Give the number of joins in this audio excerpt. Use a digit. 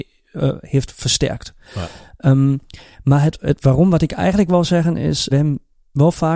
1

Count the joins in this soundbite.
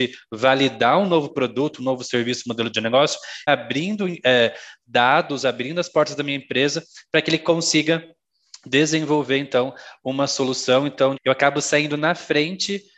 2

